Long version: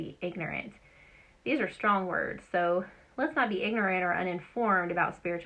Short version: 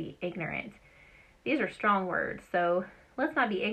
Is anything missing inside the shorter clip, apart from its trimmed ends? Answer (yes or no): no